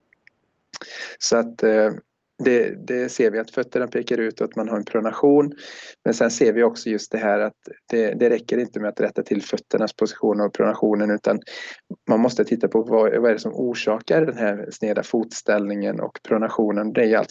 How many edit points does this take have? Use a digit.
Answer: 0